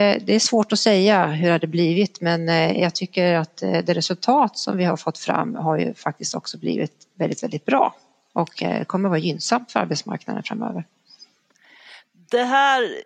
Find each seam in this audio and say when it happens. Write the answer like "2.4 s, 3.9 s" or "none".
none